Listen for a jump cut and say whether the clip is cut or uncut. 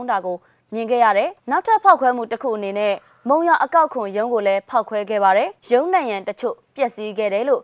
cut